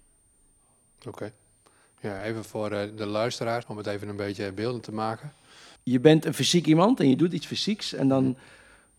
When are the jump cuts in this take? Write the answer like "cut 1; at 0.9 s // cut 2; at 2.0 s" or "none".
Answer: cut 1; at 3.6 s // cut 2; at 5.8 s